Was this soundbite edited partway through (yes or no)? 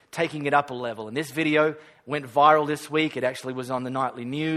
no